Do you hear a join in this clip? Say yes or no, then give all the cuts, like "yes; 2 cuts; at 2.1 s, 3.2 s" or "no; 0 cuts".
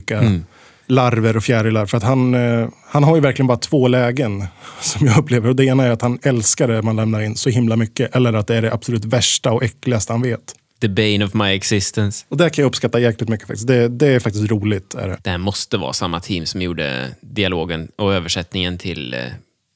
yes; 2 cuts; at 12.2 s, 15.2 s